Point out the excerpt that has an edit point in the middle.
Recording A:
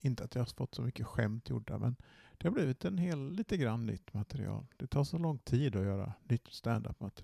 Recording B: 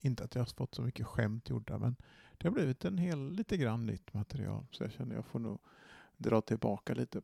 B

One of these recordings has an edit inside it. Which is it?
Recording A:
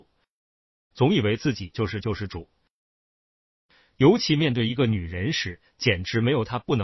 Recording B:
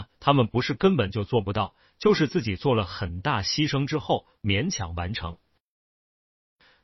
A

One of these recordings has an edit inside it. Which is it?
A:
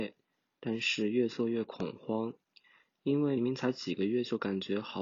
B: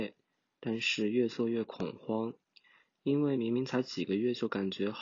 A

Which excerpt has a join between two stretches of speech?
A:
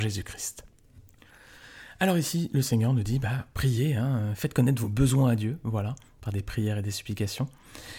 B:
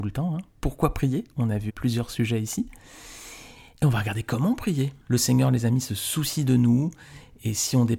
B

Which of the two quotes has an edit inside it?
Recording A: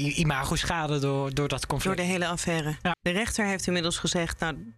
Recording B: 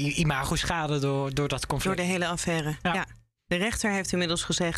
A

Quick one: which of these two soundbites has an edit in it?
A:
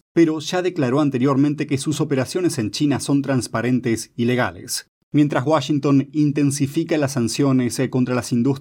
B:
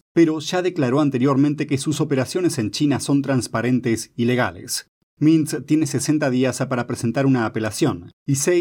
A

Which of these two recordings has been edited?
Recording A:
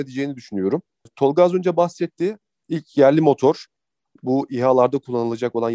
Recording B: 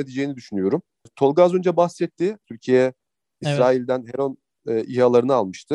B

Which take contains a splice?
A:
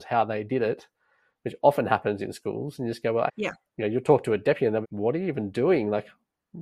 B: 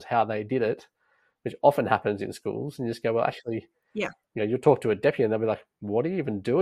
A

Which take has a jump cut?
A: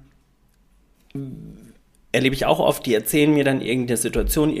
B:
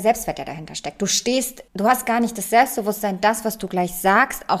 B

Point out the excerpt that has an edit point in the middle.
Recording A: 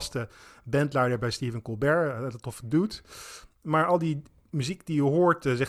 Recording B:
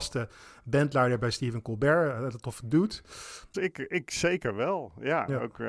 B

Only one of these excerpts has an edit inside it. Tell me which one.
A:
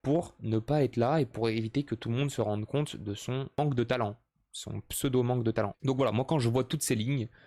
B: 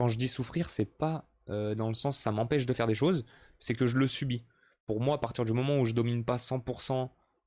A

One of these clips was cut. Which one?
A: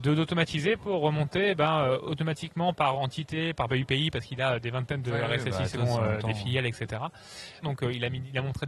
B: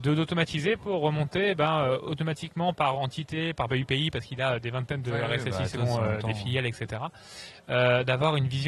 A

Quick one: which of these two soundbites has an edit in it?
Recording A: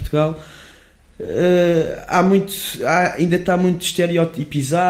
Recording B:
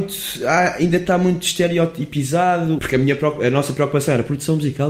B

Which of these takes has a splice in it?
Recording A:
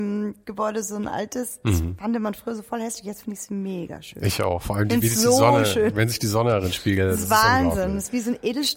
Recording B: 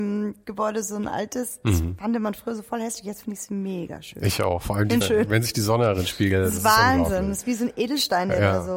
B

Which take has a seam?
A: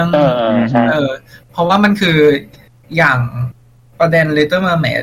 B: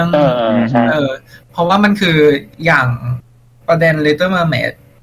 B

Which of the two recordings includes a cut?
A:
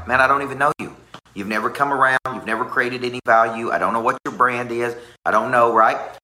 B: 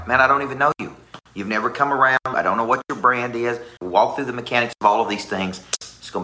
B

